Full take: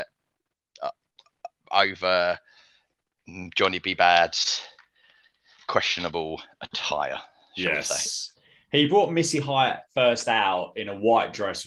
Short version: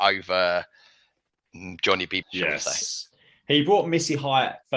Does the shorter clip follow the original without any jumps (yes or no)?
no